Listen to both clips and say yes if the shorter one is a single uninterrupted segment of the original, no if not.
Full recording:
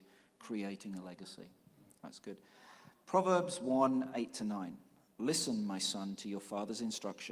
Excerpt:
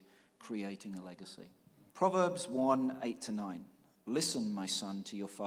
no